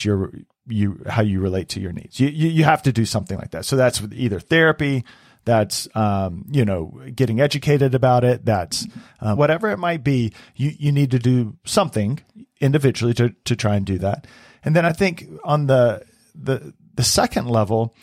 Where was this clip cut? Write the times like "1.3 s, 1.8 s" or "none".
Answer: 9.4 s